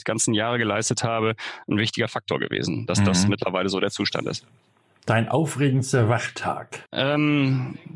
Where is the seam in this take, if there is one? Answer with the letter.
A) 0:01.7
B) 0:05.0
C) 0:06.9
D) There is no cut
C